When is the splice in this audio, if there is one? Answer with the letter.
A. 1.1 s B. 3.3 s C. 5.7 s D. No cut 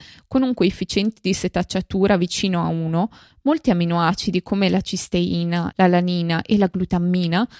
C